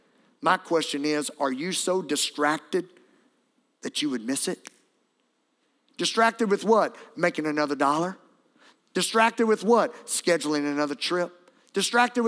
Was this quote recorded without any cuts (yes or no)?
yes